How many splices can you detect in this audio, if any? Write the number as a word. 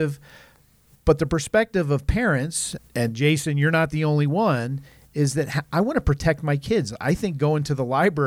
one